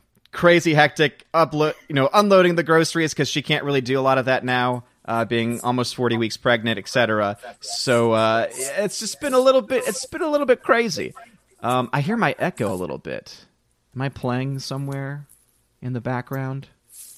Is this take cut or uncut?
uncut